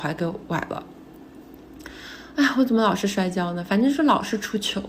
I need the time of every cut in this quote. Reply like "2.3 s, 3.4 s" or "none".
none